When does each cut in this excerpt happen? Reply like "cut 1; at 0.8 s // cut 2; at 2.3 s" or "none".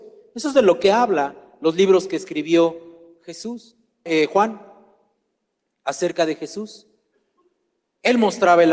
cut 1; at 4.1 s